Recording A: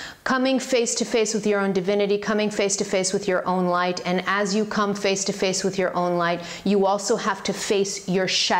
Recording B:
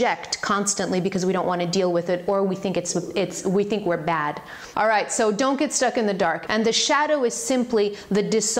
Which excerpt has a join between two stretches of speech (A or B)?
B